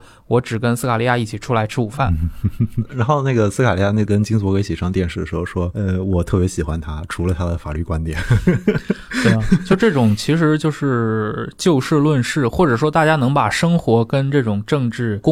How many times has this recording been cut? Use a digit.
0